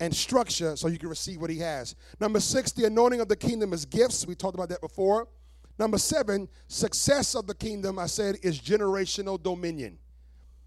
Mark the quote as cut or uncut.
uncut